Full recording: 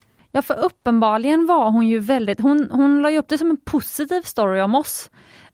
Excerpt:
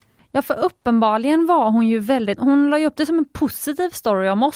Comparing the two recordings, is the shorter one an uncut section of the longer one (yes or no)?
no